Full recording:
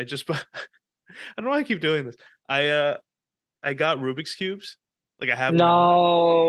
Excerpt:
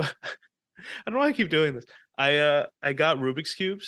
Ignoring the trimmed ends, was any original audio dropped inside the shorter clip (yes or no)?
yes